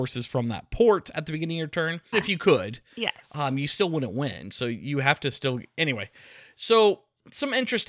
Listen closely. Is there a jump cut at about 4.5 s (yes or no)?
no